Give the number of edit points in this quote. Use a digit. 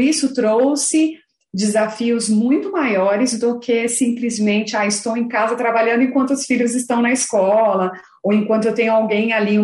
0